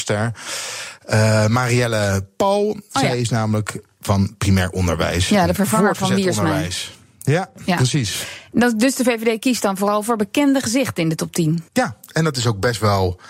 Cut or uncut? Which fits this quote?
cut